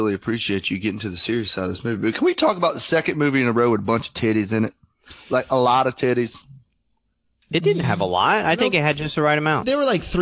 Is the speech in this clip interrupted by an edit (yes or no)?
no